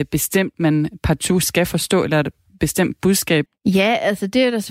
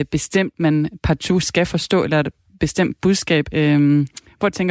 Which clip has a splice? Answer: first; 1 cut; at 3.5 s

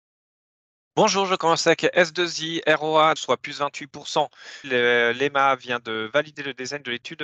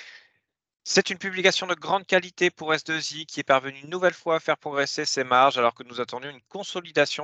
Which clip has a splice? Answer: first; 2 cuts; at 3.2 s, 4.6 s

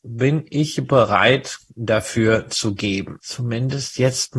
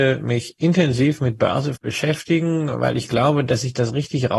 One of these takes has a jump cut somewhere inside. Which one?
first; 1 cut; at 3.2 s

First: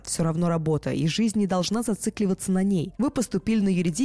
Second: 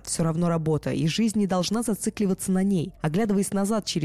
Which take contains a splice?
first; 1 cut; at 3.0 s

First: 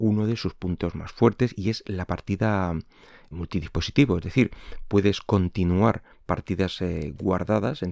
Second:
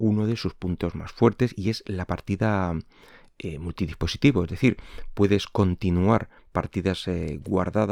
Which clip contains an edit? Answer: first; 1 cut; at 3.3 s

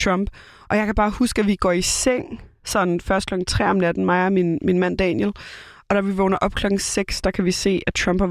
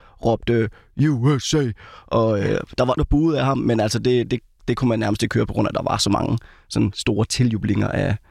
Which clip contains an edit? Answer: second; 1 cut; at 3.0 s

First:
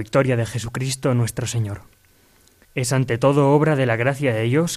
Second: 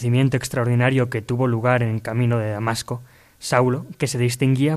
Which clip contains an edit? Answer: first; 1 cut; at 2.6 s

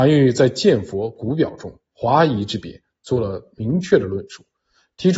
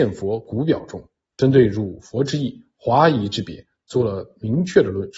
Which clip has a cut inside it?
first; 1 cut; at 1.9 s

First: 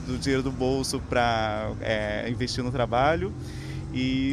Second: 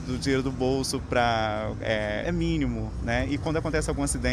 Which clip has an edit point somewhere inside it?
second; 1 cut; at 2.2 s

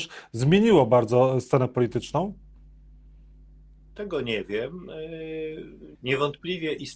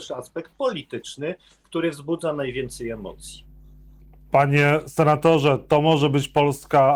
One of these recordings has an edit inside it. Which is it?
first; 1 cut; at 5.9 s

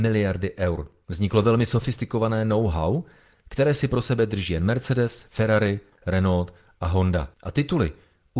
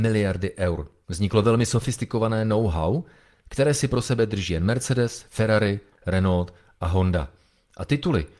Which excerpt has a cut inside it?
first; 1 cut; at 7.3 s

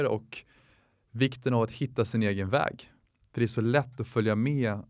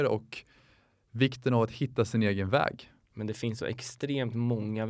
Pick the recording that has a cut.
second; 1 cut; at 3.1 s

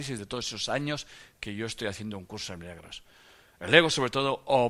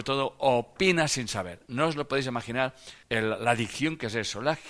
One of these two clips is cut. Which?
second; 1 cut; at 3.0 s

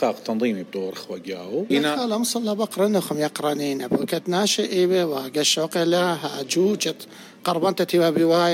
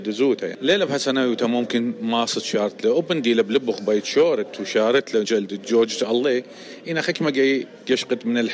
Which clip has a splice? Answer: second; 1 cut; at 5.2 s

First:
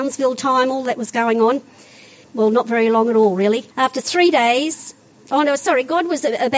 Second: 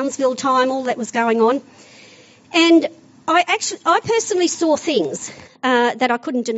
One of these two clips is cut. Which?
first; 2 cuts; at 2.2 s, 3.7 s

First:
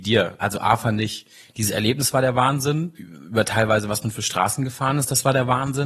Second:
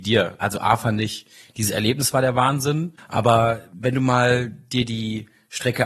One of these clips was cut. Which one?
second; 1 cut; at 3.0 s

